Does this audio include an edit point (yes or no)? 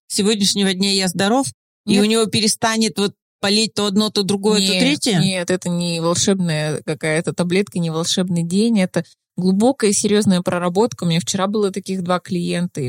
no